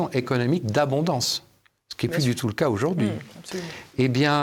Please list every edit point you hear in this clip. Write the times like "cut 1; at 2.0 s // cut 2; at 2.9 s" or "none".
none

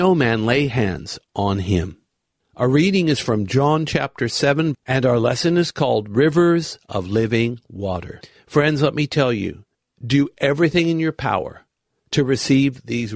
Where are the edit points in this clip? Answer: cut 1; at 4.7 s

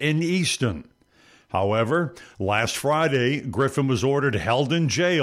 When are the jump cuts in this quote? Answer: none

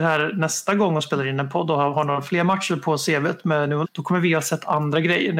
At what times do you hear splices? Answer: cut 1; at 3.8 s

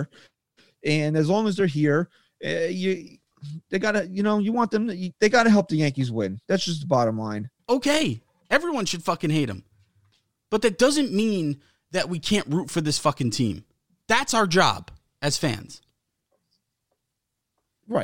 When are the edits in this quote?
cut 1; at 7.6 s

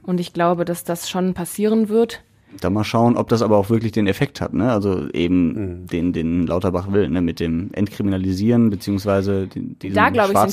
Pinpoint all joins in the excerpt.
none

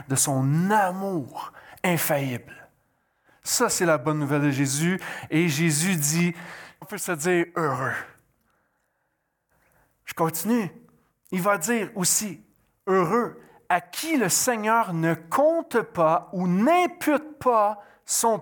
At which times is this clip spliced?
cut 1; at 6.8 s

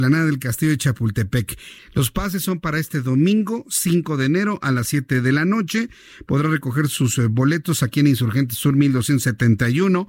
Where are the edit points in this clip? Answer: cut 1; at 1.8 s

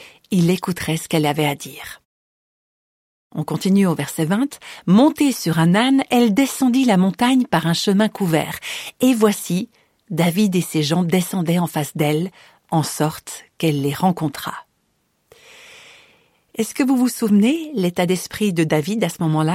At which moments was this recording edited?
none

